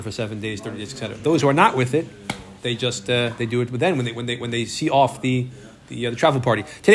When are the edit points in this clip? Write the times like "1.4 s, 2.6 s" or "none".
none

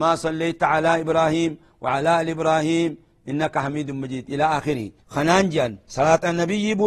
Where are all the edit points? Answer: 5.0 s

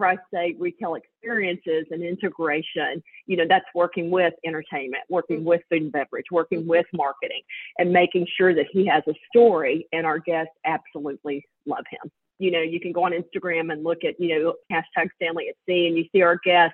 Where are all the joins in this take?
12.3 s

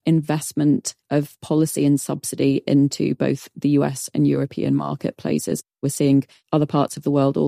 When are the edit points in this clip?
none

